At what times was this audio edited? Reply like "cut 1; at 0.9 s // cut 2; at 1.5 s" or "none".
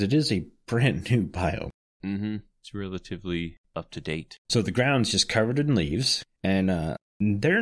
cut 1; at 4.5 s // cut 2; at 6.4 s